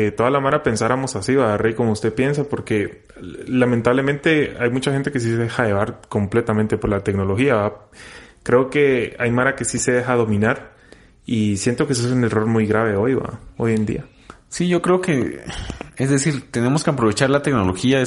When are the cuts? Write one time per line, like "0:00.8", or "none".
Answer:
none